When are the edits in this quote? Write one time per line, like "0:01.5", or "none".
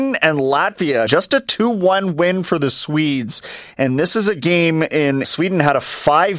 0:01.1
0:05.2